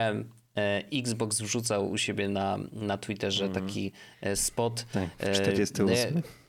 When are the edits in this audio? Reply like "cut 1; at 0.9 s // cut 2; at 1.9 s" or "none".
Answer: none